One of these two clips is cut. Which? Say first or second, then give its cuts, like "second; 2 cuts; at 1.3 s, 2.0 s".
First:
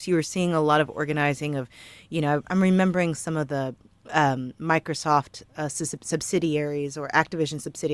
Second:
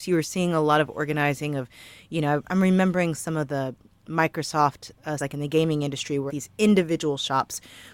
second; 3 cuts; at 4.0 s, 5.2 s, 6.3 s